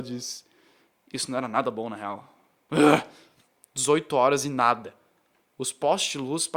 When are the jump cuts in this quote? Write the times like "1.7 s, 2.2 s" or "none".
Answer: none